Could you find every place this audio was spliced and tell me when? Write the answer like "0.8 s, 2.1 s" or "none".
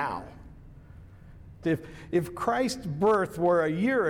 1.6 s